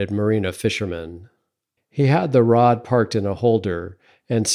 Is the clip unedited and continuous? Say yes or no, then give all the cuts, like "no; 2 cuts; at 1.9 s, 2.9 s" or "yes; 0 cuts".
no; 1 cut; at 1.8 s